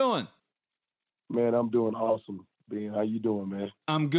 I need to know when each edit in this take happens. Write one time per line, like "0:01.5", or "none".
none